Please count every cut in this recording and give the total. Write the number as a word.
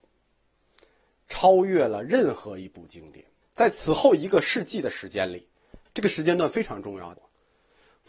three